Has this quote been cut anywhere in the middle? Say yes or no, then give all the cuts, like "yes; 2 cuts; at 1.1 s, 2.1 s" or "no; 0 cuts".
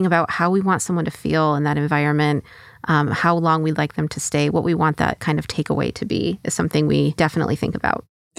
no; 0 cuts